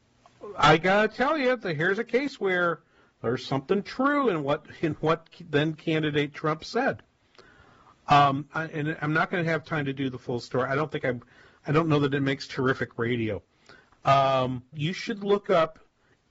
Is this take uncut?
no; 2 cuts; at 8.5 s, 14.7 s

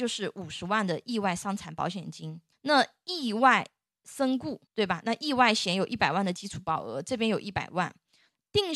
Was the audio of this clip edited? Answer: yes; 2 cuts; at 2.5 s, 4.7 s

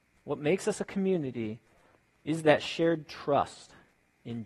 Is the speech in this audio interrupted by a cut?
no; 0 cuts

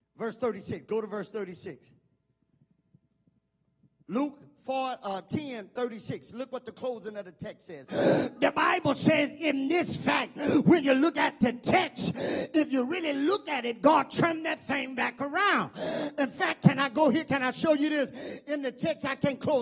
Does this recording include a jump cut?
yes; 1 cut; at 7.9 s

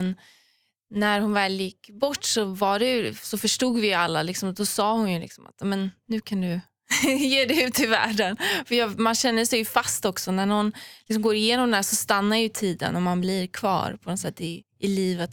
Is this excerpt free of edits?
yes; 0 cuts

